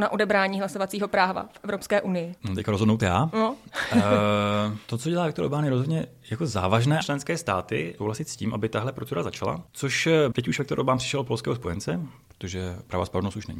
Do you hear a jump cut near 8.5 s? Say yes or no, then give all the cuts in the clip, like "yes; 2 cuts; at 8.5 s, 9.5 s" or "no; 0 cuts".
no; 1 cut; at 7.0 s